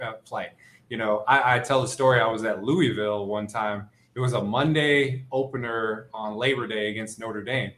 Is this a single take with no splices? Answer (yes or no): yes